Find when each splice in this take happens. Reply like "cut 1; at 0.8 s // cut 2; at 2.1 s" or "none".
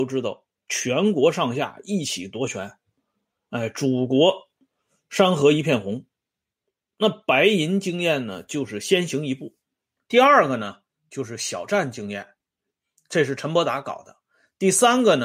cut 1; at 10.0 s